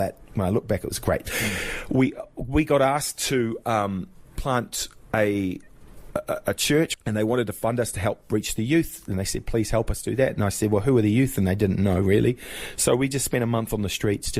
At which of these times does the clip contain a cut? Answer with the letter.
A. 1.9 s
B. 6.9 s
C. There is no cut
B